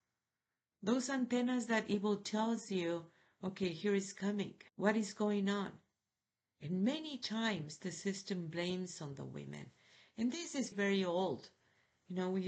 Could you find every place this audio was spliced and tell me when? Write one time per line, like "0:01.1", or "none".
0:04.7
0:10.7